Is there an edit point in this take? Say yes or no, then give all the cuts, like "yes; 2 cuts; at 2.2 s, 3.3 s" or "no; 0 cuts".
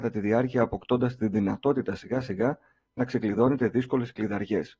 no; 0 cuts